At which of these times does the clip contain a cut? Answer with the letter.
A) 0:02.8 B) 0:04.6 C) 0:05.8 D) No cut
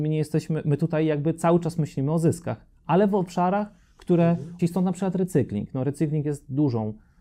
B